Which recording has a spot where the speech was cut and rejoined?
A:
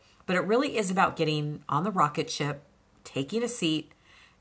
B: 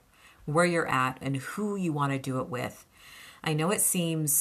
B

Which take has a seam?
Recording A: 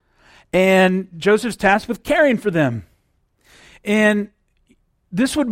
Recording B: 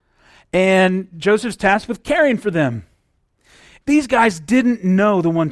B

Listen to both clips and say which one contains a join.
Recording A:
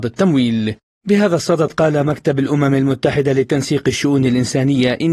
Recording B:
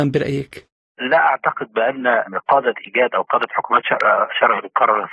A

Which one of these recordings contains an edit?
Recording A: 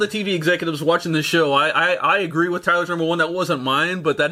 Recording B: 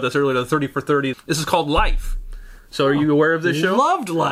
B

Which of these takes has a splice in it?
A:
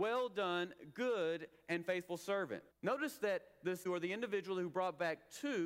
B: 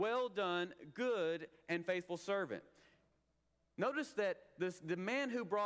A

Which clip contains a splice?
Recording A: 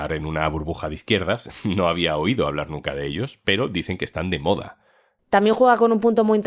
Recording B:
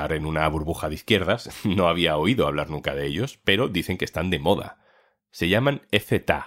A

